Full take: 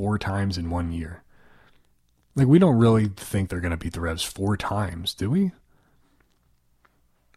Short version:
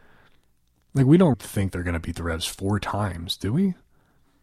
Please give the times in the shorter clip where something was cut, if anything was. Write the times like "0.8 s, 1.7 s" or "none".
1.3 s